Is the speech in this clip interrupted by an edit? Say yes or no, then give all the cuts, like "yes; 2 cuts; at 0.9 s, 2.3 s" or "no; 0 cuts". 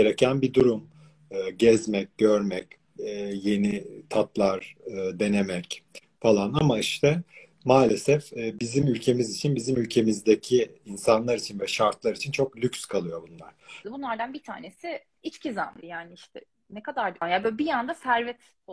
yes; 3 cuts; at 13.8 s, 15.8 s, 17.2 s